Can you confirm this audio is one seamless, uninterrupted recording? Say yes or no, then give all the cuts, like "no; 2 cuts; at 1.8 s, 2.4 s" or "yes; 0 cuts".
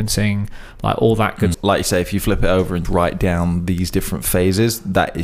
no; 2 cuts; at 1.5 s, 2.8 s